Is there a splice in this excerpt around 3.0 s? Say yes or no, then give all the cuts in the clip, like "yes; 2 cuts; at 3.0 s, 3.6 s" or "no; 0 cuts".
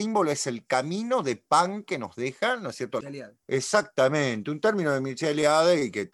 yes; 1 cut; at 3.0 s